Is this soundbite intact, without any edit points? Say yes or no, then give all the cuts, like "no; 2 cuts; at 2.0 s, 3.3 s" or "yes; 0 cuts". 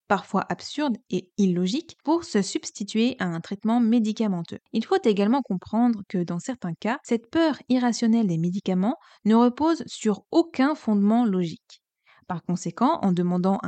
no; 1 cut; at 4.6 s